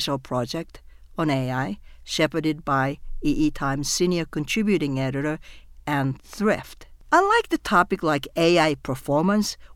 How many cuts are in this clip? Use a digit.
1